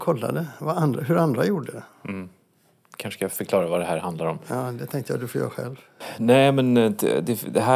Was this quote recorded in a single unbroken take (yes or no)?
yes